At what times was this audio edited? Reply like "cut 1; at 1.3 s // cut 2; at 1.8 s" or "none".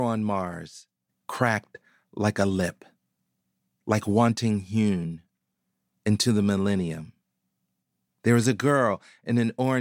cut 1; at 1.1 s